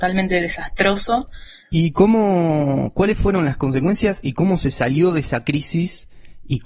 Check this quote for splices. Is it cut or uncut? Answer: cut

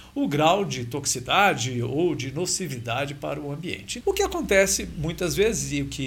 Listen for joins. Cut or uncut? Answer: cut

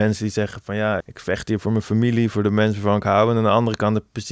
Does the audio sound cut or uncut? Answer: cut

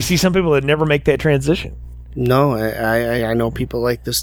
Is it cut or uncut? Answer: uncut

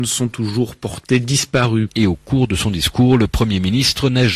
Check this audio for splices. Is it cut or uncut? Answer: cut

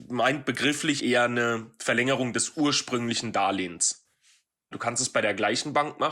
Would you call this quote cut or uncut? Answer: cut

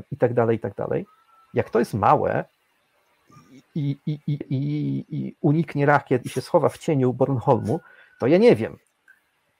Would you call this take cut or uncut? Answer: cut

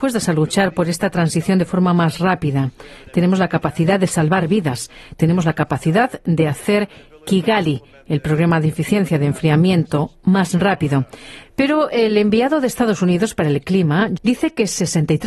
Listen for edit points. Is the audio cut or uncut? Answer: cut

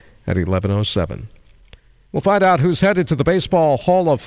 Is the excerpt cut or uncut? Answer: uncut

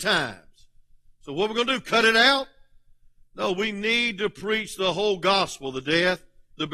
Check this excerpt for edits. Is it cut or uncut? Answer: uncut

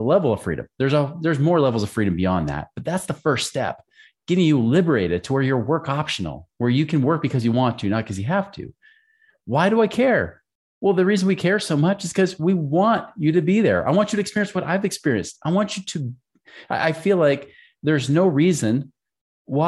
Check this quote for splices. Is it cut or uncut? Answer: uncut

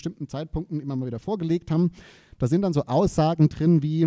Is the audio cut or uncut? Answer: uncut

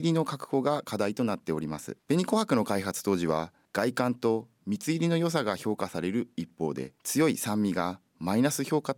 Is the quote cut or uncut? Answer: cut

